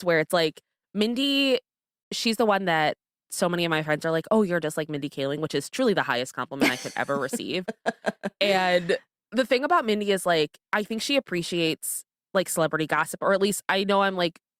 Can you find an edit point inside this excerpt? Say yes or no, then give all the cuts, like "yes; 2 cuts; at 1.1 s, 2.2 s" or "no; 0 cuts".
no; 0 cuts